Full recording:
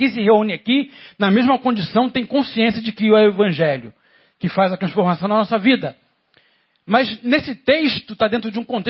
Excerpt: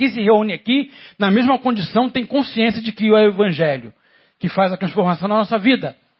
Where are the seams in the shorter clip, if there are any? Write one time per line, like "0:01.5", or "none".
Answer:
none